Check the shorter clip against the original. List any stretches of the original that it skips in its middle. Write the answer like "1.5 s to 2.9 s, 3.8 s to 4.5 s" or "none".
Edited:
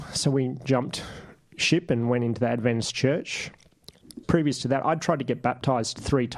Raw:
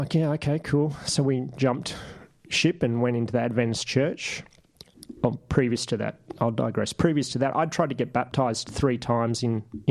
5.2 s to 6.9 s